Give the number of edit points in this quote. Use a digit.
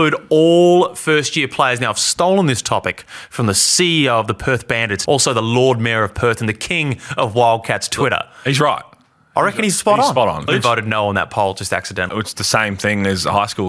3